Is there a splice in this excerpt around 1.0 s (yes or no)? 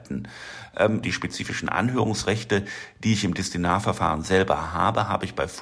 yes